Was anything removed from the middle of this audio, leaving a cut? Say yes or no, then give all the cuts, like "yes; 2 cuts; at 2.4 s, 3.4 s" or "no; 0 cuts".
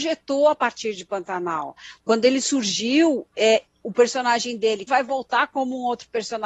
yes; 1 cut; at 4.9 s